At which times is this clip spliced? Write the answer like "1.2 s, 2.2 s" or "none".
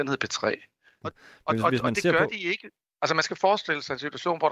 1.0 s, 2.9 s